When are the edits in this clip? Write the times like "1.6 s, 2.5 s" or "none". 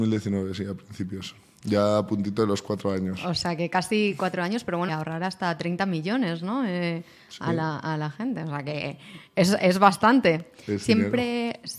4.9 s

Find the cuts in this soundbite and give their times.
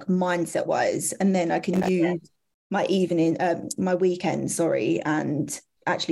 none

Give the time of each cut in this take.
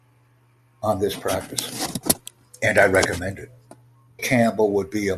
4.2 s

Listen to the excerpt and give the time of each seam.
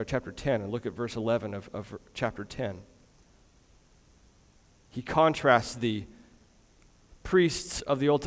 none

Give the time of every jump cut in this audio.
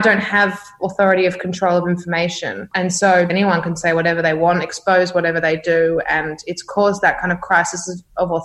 3.3 s

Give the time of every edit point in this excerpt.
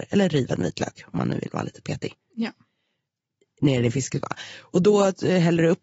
none

